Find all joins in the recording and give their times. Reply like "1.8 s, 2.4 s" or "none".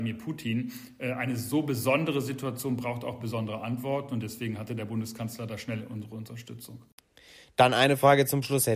none